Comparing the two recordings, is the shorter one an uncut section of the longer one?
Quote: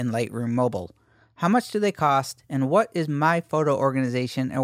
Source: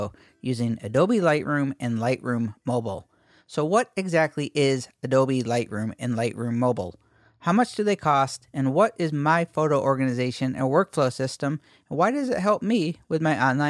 yes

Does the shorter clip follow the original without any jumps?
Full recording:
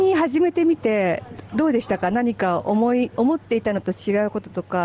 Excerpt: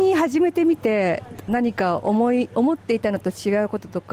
no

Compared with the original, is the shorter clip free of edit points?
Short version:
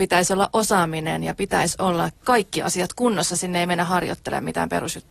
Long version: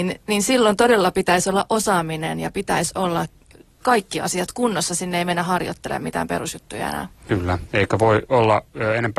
no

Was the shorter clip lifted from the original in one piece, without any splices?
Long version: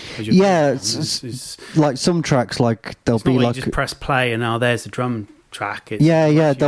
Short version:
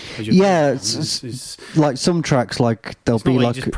yes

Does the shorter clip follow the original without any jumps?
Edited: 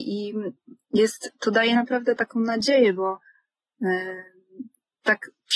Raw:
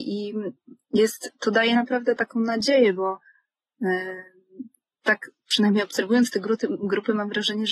yes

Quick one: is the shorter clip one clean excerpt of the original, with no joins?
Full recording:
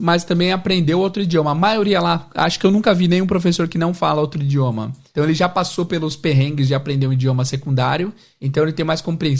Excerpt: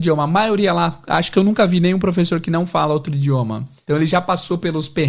yes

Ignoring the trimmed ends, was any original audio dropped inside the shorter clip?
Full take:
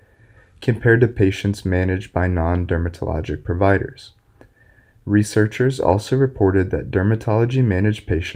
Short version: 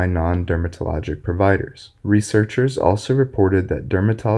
yes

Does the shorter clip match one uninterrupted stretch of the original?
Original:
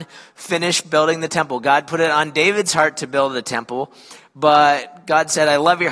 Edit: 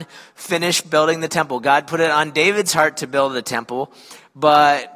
yes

